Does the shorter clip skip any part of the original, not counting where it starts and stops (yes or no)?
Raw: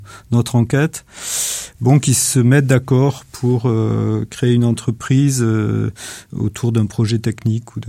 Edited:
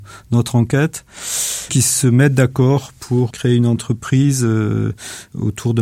yes